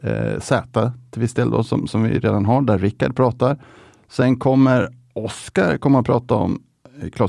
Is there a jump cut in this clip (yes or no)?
no